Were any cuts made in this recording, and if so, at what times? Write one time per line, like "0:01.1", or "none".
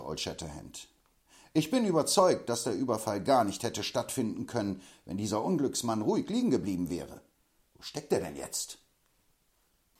none